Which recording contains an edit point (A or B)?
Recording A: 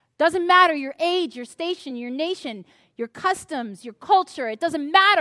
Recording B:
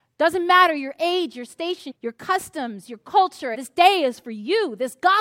B